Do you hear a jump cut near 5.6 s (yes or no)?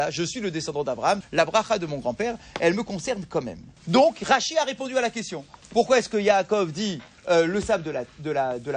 no